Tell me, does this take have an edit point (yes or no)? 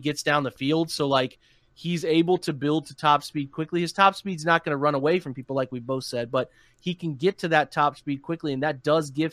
no